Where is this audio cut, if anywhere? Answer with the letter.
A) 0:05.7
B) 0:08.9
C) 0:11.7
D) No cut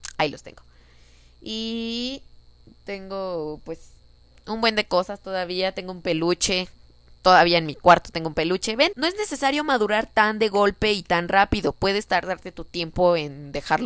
B